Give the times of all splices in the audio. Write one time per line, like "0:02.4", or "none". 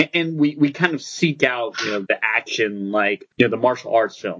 0:03.3